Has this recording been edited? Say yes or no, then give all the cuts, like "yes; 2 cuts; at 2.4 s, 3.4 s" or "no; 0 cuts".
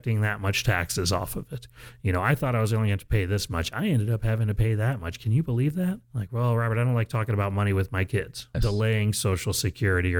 yes; 2 cuts; at 6.0 s, 8.5 s